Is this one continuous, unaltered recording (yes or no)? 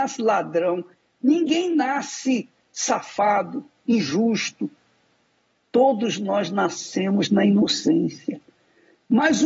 no